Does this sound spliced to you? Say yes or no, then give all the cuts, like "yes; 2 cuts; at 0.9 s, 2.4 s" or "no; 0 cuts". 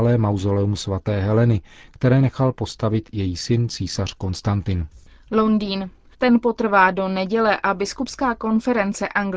yes; 1 cut; at 6.1 s